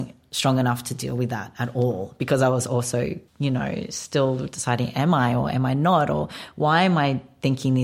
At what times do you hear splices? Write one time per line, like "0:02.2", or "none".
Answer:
0:03.3